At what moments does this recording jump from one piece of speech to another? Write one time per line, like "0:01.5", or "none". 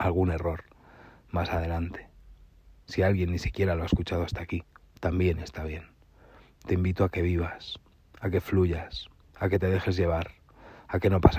0:02.8
0:06.5